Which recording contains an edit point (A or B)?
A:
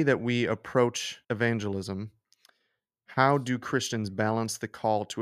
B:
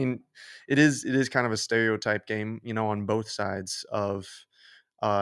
A